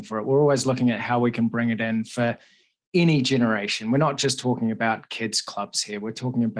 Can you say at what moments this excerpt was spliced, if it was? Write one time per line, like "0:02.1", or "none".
none